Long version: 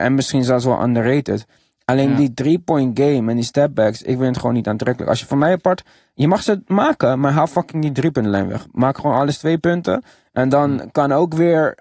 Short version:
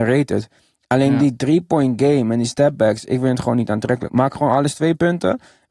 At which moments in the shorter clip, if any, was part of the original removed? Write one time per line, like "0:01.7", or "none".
0:04.1